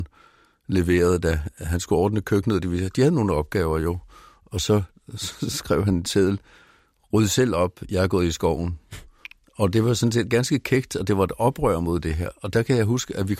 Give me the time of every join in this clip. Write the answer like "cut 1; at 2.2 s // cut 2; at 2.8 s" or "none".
none